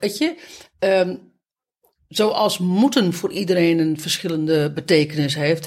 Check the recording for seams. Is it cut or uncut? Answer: uncut